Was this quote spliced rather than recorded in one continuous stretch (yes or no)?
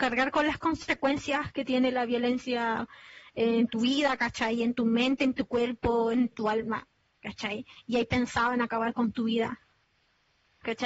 yes